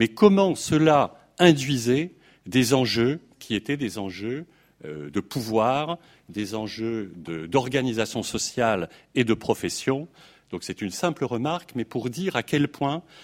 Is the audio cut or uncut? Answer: uncut